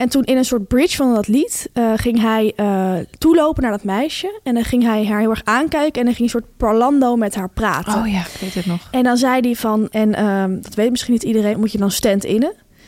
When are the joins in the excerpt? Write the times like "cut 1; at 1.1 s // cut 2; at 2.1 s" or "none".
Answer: cut 1; at 9.9 s // cut 2; at 11.5 s

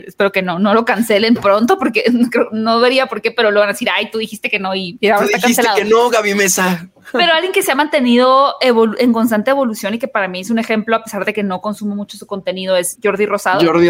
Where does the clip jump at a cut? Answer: cut 1; at 13.0 s

